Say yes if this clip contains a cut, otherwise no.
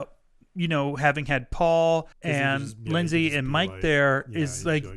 yes